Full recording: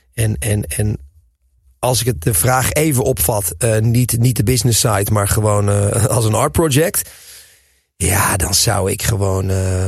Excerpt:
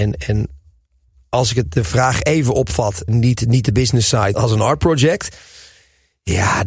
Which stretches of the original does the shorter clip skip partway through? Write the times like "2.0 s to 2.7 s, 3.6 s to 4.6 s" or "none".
3.6 s to 3.8 s, 5.1 s to 6.1 s